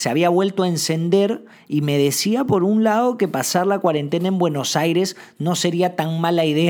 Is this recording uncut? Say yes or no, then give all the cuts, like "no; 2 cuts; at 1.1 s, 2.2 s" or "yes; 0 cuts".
yes; 0 cuts